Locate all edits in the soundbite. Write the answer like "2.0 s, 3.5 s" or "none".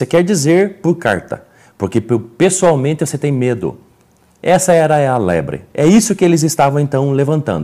none

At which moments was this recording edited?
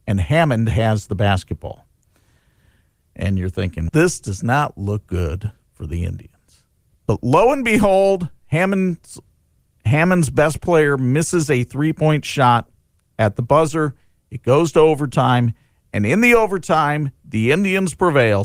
3.9 s

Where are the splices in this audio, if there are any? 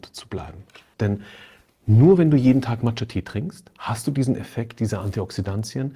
0.9 s

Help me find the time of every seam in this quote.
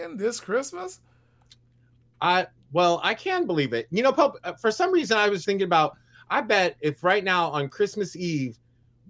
5.4 s

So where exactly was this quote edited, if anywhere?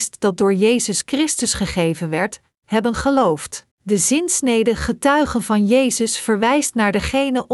3.7 s

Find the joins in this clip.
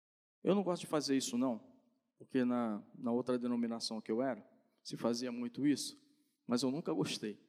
none

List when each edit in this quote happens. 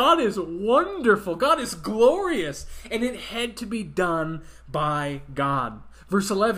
none

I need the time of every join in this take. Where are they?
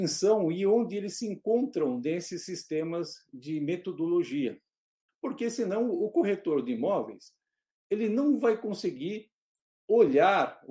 5.1 s

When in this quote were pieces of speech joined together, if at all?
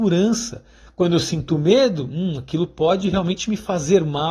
none

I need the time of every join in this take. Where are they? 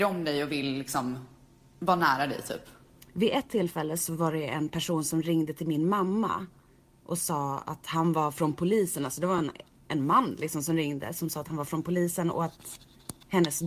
none

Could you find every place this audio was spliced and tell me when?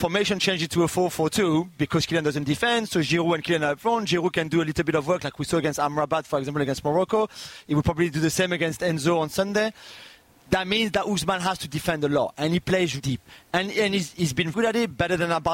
13.0 s, 14.5 s

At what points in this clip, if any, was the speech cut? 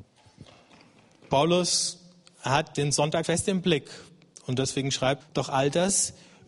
3.2 s, 5.2 s

